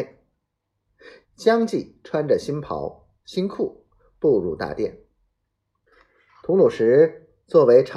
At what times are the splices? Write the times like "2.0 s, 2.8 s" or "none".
1.2 s

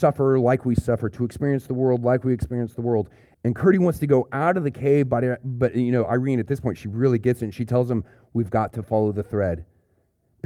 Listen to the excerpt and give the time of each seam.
3.3 s

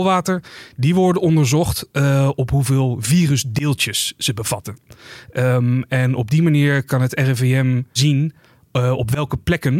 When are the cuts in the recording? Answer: none

